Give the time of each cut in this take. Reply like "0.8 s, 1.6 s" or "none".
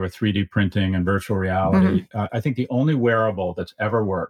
2.3 s